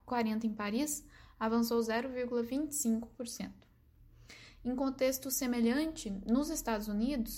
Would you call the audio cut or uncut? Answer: uncut